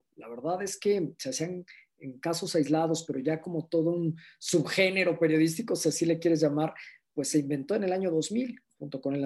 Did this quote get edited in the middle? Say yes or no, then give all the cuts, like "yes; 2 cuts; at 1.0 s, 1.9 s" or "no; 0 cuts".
no; 0 cuts